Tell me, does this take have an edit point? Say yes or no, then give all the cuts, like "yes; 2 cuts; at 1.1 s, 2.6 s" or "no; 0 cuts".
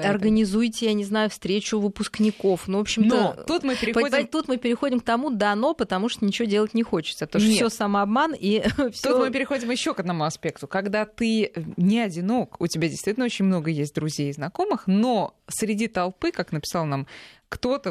no; 0 cuts